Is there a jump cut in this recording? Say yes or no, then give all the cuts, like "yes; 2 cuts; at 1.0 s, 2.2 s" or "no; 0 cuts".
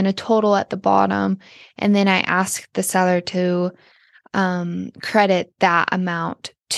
no; 0 cuts